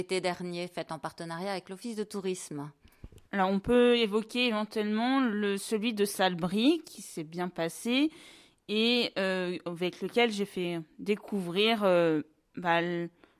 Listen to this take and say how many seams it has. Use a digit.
1